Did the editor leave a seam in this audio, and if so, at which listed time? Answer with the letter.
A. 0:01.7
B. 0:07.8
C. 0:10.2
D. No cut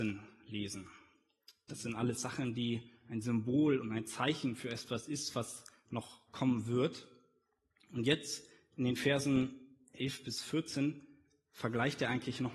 A